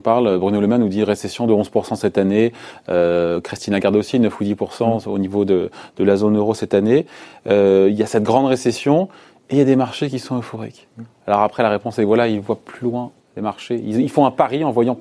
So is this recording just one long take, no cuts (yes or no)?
yes